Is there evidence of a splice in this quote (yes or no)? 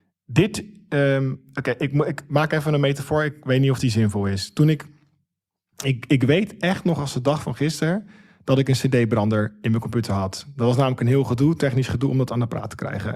no